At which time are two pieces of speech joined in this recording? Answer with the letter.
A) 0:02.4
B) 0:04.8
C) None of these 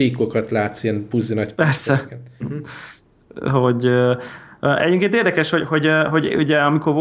A